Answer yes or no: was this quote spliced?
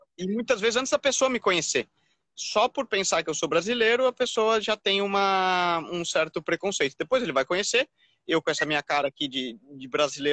no